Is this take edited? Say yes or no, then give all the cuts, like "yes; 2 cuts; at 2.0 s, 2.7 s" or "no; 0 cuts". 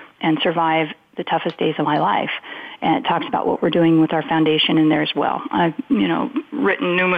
no; 0 cuts